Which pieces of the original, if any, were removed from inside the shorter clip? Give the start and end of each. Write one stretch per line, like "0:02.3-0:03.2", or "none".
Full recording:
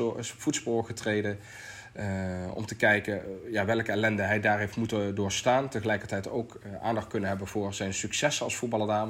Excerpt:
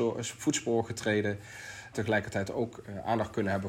0:01.9-0:05.7